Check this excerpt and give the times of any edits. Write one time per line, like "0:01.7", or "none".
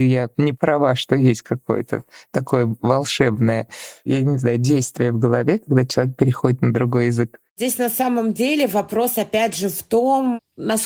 none